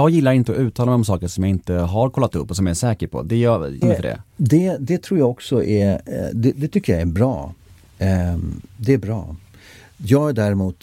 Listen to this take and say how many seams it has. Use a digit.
1